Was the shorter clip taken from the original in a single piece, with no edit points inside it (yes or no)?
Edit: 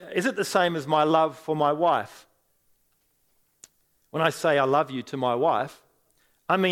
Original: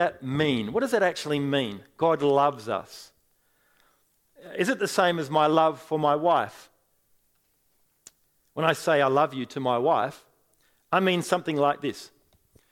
yes